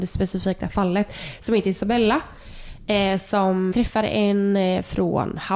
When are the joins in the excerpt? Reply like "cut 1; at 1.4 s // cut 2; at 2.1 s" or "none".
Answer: cut 1; at 3.7 s